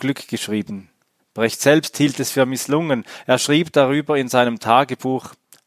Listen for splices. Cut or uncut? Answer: cut